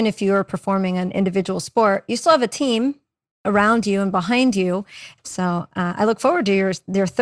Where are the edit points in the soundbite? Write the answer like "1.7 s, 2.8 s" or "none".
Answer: 5.2 s